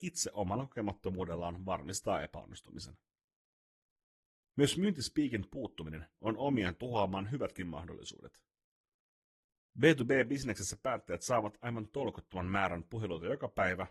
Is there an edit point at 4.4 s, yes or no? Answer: no